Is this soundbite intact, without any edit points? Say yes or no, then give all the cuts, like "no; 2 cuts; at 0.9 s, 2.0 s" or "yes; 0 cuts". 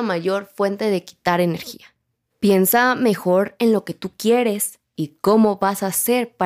yes; 0 cuts